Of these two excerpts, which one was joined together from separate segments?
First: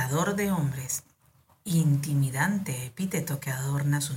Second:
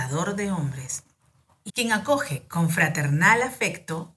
second; 1 cut; at 1.7 s

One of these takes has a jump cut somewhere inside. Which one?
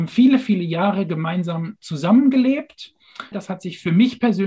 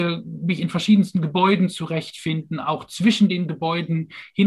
first; 1 cut; at 3.3 s

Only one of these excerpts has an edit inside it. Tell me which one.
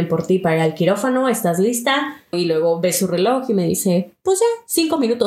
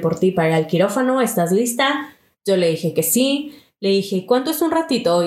first; 1 cut; at 2.3 s

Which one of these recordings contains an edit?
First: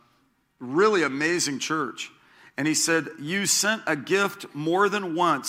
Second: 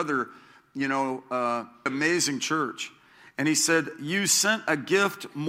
second; 1 cut; at 1.9 s

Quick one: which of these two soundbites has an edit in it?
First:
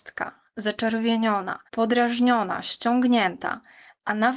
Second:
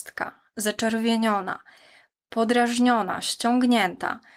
first; 1 cut; at 1.7 s

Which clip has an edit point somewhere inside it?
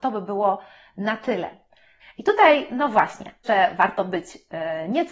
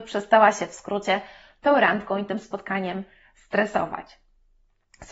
first; 2 cuts; at 2.0 s, 3.4 s

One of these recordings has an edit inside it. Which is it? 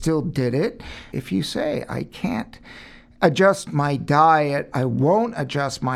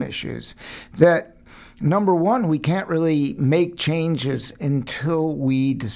first; 1 cut; at 1.1 s

